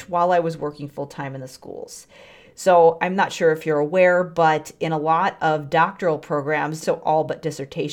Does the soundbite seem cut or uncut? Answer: cut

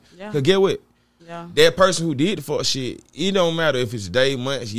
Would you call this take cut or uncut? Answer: cut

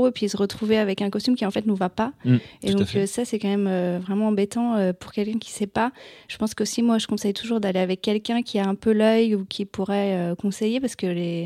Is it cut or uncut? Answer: uncut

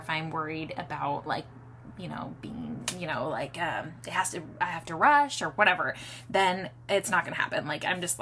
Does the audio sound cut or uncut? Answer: cut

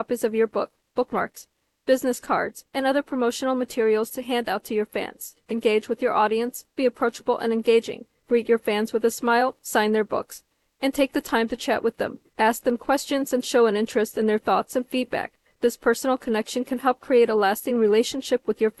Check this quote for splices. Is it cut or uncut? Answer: uncut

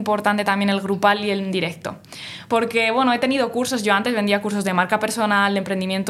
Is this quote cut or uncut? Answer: uncut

